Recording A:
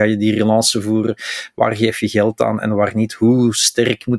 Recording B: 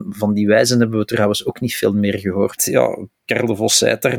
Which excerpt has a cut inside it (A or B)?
B